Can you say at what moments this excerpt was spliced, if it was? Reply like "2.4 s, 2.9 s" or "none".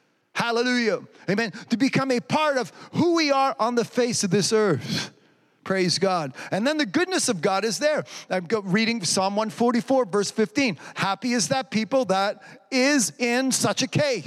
none